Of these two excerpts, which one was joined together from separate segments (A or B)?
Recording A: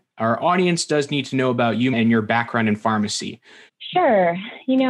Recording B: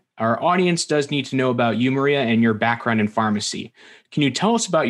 A